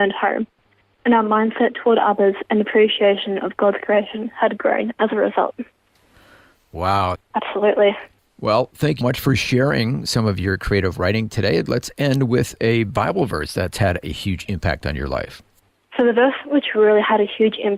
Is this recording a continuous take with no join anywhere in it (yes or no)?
no